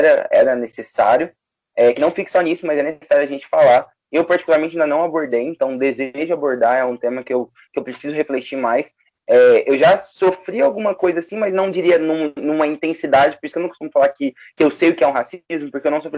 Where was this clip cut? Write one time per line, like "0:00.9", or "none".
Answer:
none